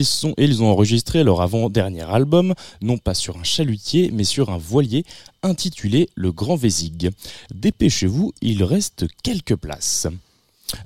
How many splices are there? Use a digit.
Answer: 1